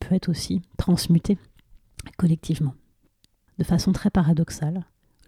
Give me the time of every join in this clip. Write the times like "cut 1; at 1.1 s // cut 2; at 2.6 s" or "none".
cut 1; at 3.5 s